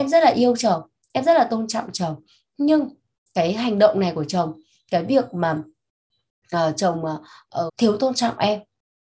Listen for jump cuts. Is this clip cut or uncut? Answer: cut